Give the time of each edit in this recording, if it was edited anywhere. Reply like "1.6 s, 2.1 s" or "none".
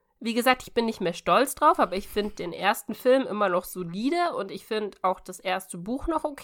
none